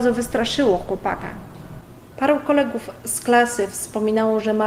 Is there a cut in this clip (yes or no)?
yes